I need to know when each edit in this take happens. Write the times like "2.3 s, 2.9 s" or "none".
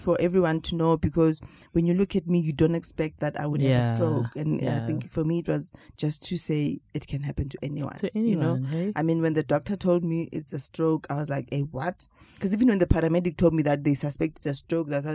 none